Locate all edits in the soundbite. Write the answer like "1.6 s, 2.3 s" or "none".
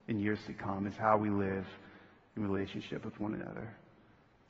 none